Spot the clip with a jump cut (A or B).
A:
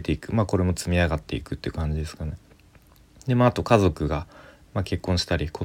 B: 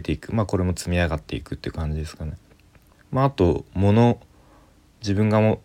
B